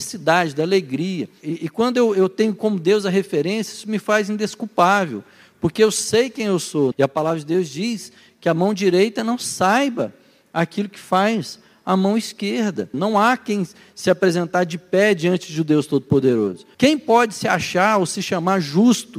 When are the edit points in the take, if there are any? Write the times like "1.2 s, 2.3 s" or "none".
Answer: 6.9 s, 12.9 s, 16.7 s